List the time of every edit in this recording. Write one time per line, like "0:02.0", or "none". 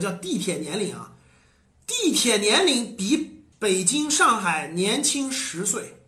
0:03.5